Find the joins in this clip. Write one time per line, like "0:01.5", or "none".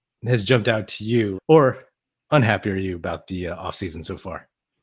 0:01.4